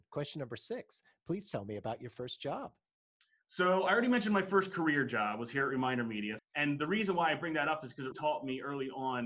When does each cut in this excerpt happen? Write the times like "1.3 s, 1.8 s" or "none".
6.4 s, 8.1 s